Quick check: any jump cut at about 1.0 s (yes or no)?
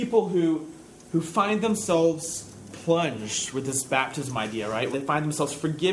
no